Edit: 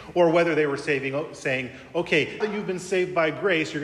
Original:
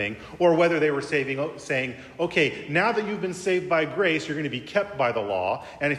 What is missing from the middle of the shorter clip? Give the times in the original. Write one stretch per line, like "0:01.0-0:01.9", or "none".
0:02.6-0:02.9